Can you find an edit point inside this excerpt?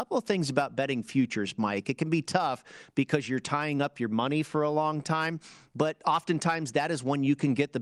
no; 0 cuts

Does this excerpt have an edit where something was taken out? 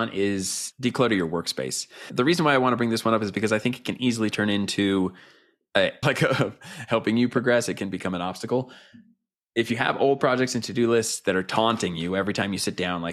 yes; 1 cut; at 6.0 s

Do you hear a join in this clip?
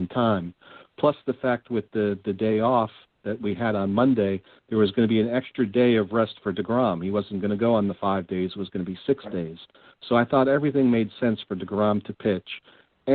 no; 0 cuts

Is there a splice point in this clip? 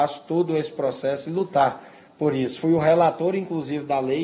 no; 0 cuts

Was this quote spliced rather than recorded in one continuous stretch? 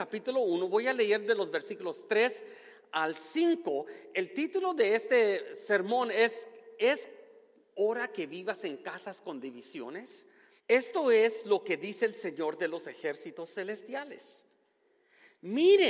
yes; 1 cut; at 10.6 s

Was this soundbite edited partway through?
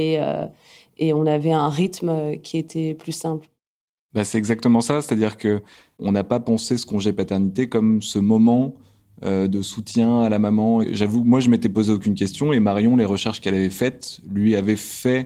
no; 0 cuts

